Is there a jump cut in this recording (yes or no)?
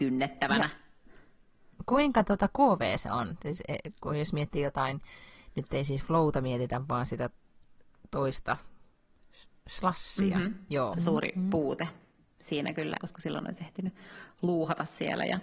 yes